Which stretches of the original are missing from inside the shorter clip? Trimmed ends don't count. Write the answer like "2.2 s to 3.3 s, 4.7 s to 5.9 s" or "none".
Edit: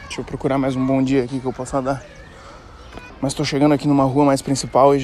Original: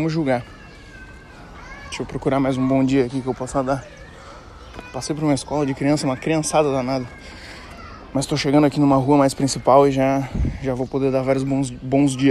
4.9 s to 8.0 s